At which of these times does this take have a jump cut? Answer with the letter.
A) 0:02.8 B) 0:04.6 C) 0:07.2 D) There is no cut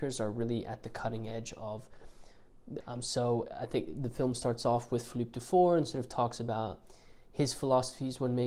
A